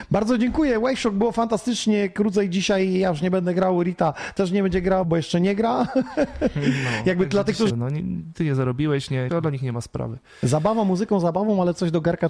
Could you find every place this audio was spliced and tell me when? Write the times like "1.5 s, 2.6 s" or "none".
5.0 s, 7.7 s, 9.3 s